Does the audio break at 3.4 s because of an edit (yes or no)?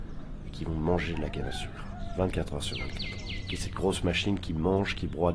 yes